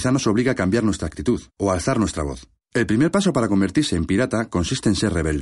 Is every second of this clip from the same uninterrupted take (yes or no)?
no